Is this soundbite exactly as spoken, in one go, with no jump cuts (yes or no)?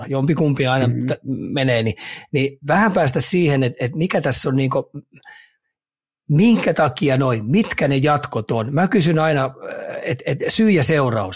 yes